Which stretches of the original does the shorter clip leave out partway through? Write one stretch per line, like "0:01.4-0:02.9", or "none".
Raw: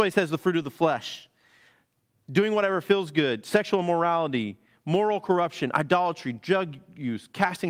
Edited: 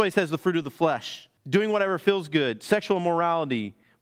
0:01.4-0:02.2